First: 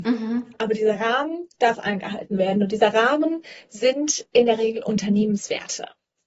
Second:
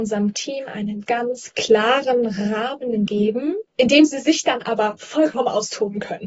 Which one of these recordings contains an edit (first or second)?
second